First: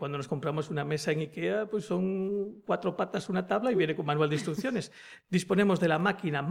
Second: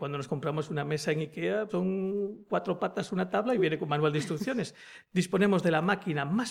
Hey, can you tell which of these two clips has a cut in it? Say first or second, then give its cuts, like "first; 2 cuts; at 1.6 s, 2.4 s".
second; 1 cut; at 1.7 s